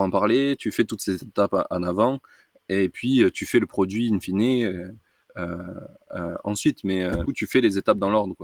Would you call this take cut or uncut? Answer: cut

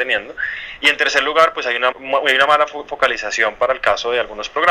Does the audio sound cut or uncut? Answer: cut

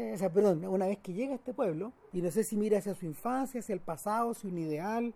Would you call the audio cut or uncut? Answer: cut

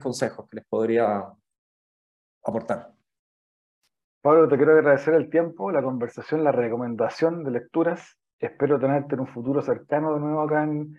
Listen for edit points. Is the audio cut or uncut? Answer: uncut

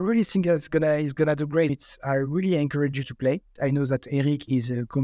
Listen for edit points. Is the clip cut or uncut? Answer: cut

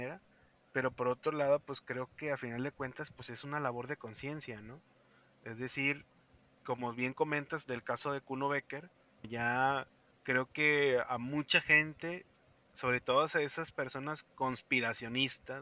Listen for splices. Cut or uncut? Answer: cut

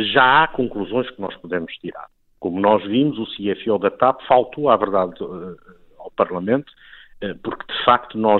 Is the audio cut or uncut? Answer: uncut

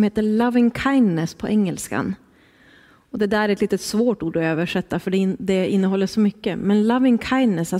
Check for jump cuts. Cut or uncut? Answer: uncut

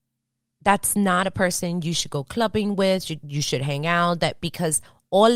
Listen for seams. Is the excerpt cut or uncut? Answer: cut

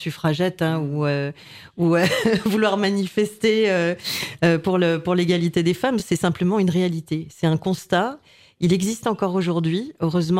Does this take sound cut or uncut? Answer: uncut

